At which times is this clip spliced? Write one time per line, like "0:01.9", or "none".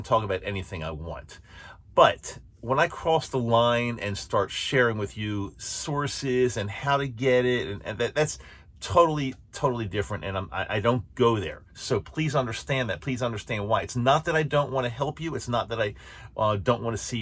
none